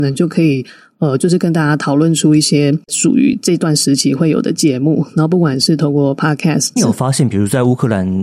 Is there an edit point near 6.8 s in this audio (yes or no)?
yes